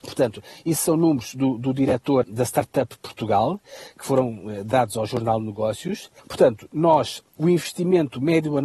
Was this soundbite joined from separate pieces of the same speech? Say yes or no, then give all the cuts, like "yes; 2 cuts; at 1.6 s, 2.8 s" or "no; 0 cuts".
yes; 3 cuts; at 2.2 s, 6.2 s, 7.4 s